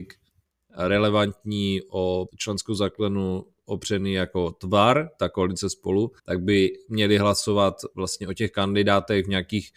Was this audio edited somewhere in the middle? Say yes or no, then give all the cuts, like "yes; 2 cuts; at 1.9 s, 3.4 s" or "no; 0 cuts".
yes; 2 cuts; at 2.3 s, 6.2 s